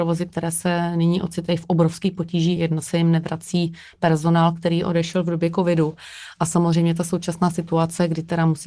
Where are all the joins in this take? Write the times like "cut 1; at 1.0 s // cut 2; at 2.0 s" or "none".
none